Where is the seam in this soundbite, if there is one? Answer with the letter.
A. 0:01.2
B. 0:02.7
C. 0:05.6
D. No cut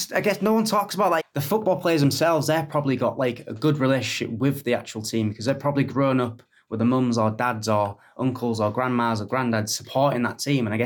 A